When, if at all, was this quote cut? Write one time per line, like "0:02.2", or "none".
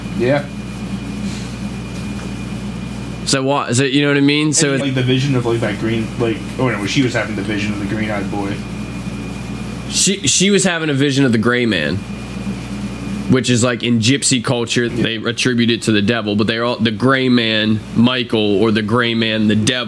0:04.8
0:14.9